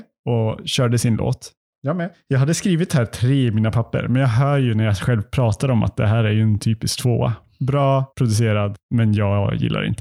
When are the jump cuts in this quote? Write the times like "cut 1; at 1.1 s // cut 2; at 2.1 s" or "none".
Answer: cut 1; at 1.7 s // cut 2; at 8.1 s